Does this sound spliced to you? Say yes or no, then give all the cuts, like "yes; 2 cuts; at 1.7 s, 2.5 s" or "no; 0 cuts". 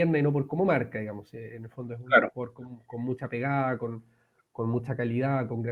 no; 0 cuts